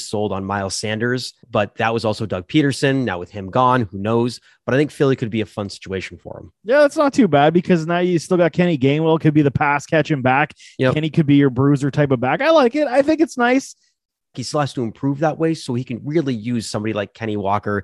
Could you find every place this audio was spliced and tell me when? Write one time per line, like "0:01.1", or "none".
0:01.4
0:14.3